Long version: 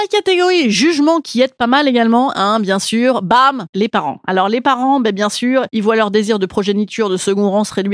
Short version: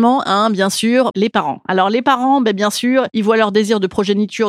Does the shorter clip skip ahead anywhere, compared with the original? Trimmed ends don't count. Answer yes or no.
yes